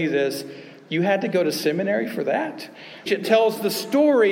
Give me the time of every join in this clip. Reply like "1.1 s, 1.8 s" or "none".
3.1 s